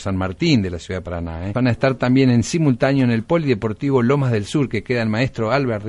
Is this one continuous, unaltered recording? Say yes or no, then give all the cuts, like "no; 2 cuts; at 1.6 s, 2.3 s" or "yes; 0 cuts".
no; 1 cut; at 1.5 s